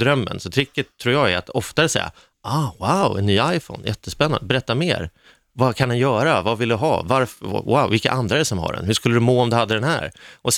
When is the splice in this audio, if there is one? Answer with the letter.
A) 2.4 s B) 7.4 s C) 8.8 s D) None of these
D